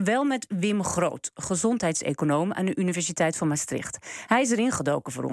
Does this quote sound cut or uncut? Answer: uncut